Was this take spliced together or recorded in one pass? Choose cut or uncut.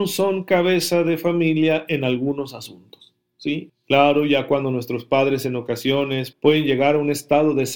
cut